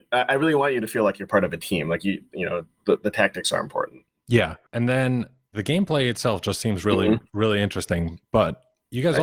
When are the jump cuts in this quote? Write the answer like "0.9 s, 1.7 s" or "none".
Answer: none

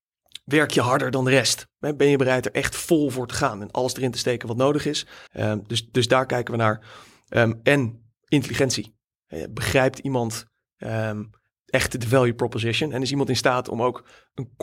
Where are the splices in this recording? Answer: 5.3 s

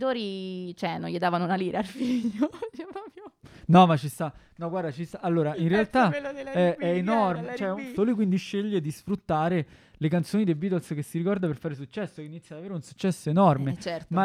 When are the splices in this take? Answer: 8.0 s

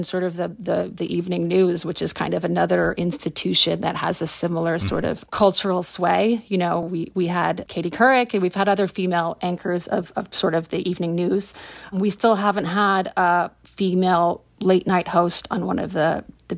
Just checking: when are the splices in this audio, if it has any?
none

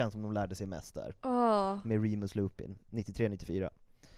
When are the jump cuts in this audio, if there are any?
none

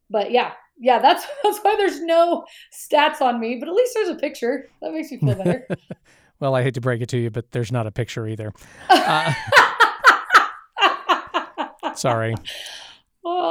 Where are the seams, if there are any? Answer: none

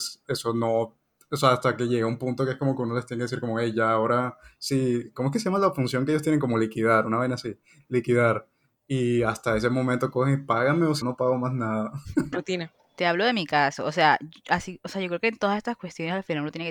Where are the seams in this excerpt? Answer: 11.0 s, 12.3 s

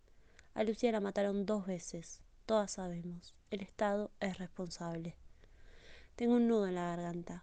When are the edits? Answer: none

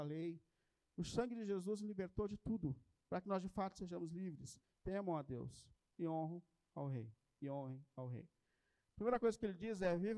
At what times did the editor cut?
4.7 s

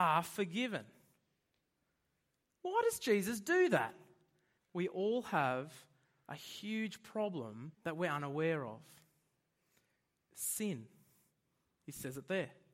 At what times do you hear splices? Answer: 2.4 s, 4.6 s, 7.7 s

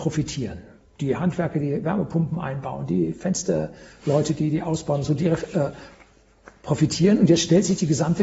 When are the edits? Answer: none

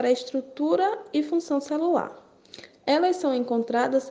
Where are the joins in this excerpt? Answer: none

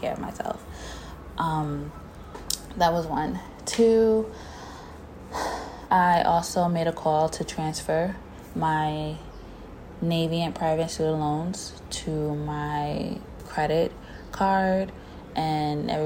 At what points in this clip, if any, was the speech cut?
5.9 s

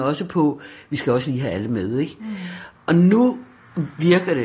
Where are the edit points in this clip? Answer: 2.8 s

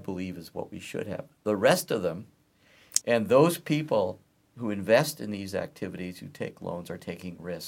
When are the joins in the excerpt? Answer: 3.0 s

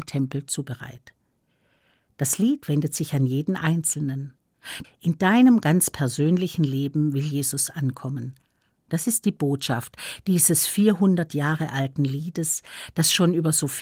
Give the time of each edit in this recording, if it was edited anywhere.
4.8 s

